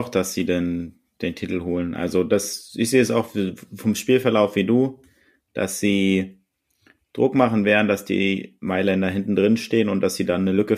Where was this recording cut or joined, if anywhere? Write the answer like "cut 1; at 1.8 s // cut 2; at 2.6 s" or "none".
none